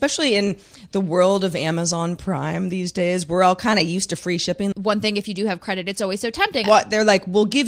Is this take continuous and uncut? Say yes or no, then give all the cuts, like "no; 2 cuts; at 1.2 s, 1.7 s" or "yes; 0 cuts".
no; 2 cuts; at 4.7 s, 6.6 s